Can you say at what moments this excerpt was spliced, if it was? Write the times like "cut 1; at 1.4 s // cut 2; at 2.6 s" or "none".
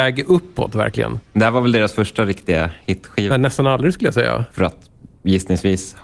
cut 1; at 3.3 s

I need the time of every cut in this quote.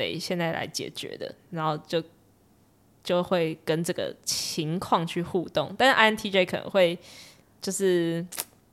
none

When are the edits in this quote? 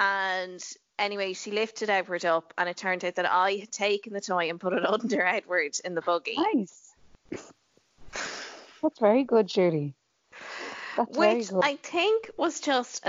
none

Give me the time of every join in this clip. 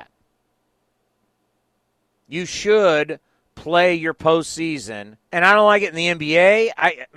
cut 1; at 5.2 s

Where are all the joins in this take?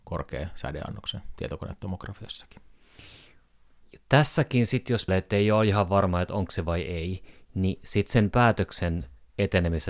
cut 1; at 5.1 s

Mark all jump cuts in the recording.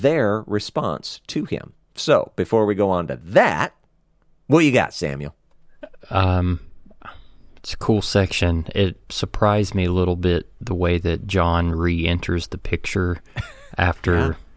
cut 1; at 9.0 s

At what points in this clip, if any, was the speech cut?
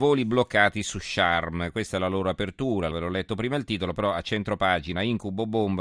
cut 1; at 2.9 s

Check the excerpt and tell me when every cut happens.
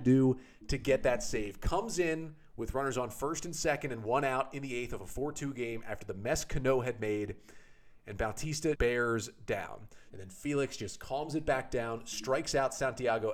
cut 1; at 8.8 s // cut 2; at 10.1 s

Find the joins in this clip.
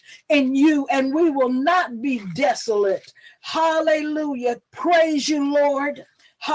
cut 1; at 4.6 s

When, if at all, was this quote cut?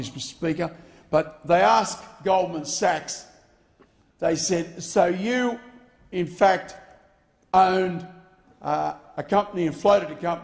none

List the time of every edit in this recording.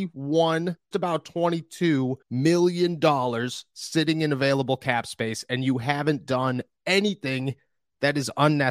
cut 1; at 0.9 s // cut 2; at 2.2 s

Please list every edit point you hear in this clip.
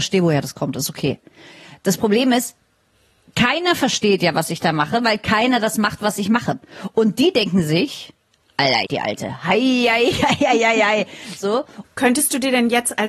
cut 1; at 8.9 s // cut 2; at 11.8 s

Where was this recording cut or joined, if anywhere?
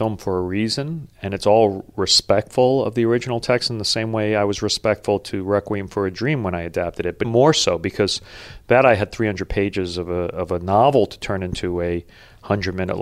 cut 1; at 7.2 s

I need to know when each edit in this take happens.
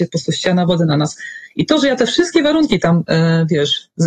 none

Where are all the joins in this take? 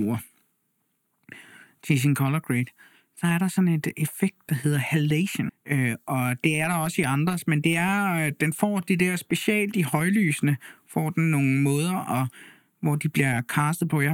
cut 1; at 5.5 s

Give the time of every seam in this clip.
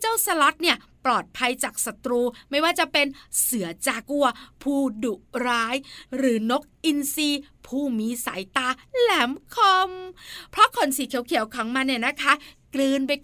cut 1; at 4.0 s

